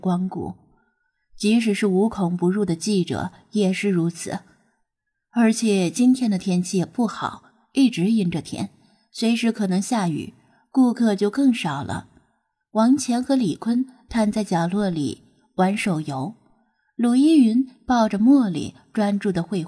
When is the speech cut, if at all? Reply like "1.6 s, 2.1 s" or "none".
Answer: none